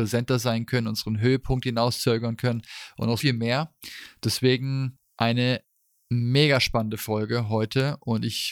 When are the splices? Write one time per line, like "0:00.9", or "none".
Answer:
0:03.2